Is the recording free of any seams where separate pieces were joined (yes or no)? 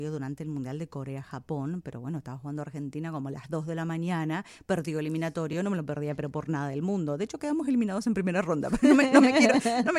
yes